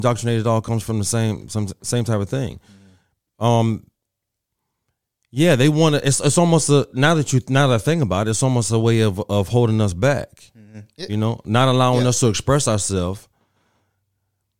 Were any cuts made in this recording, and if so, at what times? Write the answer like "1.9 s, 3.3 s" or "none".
none